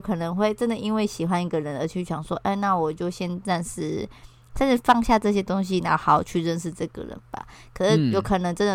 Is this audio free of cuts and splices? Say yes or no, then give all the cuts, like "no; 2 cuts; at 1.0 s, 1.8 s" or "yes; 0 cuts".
yes; 0 cuts